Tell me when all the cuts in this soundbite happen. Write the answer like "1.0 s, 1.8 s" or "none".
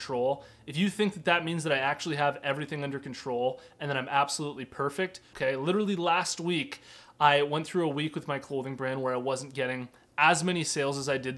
5.3 s